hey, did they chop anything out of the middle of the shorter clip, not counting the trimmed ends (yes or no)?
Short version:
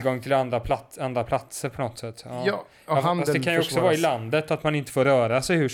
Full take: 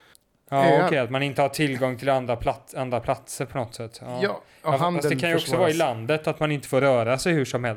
no